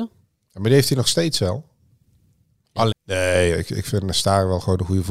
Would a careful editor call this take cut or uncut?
cut